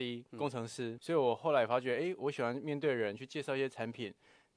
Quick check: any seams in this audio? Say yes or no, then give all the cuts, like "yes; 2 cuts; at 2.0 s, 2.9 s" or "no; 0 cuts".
yes; 1 cut; at 1.0 s